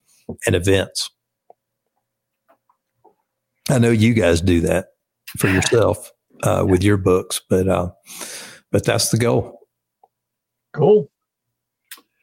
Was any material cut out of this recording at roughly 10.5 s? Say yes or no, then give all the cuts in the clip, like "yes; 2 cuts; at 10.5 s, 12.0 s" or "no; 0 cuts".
no; 0 cuts